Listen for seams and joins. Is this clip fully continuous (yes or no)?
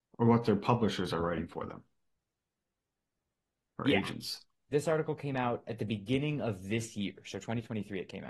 yes